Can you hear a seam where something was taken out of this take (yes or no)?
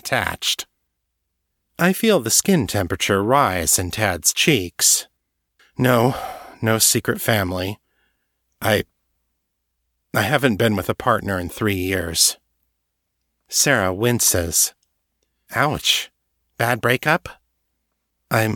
no